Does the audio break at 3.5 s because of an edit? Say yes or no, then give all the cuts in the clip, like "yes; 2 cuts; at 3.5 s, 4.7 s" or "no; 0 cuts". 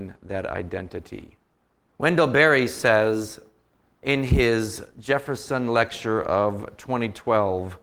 no; 1 cut; at 1.9 s